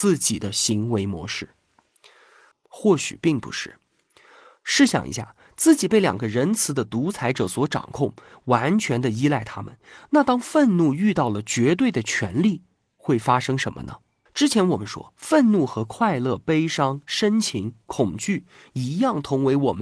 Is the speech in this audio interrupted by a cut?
yes; 2 cuts; at 2.5 s, 14.3 s

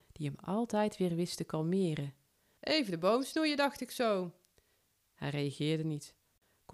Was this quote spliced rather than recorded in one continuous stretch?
yes; 1 cut; at 2.6 s

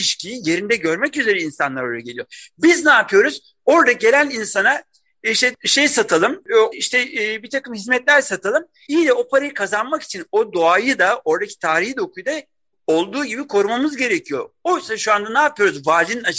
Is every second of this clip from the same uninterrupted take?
no; 2 cuts; at 6.7 s, 8.9 s

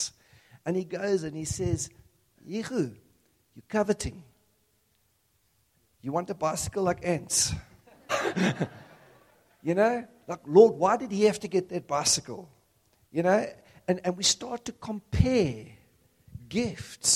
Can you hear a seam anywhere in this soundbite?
yes; 2 cuts; at 2.4 s, 8.1 s

